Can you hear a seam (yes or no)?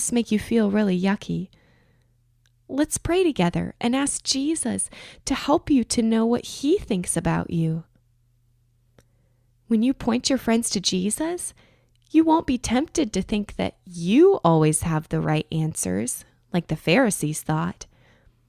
no